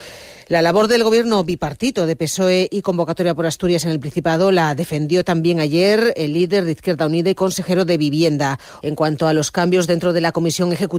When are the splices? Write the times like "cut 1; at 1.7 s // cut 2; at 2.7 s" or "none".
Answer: cut 1; at 8.8 s